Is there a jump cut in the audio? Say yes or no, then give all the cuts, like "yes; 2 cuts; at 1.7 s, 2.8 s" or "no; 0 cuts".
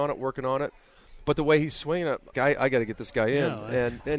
yes; 1 cut; at 2.3 s